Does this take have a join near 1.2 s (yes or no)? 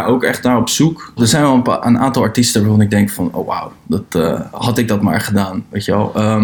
yes